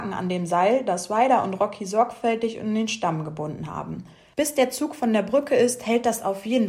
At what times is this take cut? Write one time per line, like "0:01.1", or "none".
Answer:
0:04.3